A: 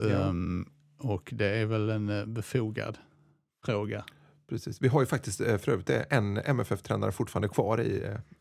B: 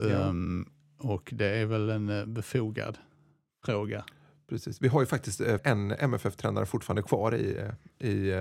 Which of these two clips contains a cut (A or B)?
B